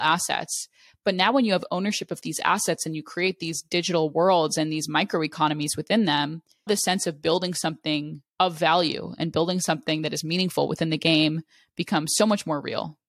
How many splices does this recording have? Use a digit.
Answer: 2